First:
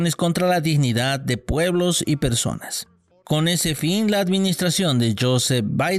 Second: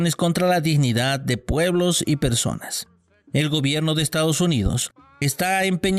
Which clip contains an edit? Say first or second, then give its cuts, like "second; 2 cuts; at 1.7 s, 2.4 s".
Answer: first; 1 cut; at 3.1 s